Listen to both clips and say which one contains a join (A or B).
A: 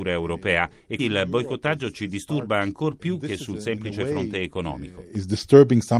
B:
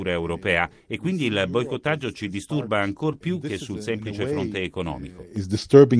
A